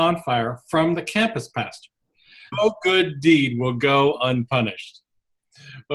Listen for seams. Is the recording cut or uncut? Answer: cut